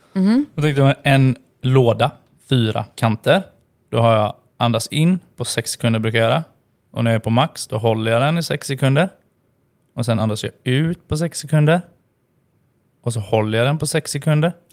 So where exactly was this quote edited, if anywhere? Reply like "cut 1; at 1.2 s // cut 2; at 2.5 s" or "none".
none